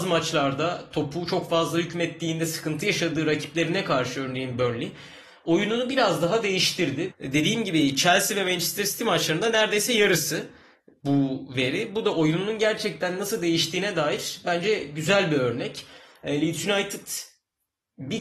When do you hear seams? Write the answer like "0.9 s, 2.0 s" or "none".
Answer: 7.1 s